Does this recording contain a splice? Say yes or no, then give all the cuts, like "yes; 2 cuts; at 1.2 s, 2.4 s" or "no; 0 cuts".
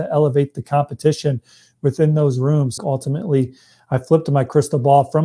yes; 1 cut; at 2.8 s